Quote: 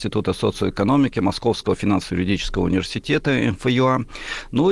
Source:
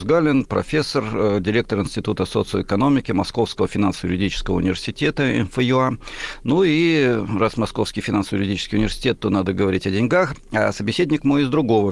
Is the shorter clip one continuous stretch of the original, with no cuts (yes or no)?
yes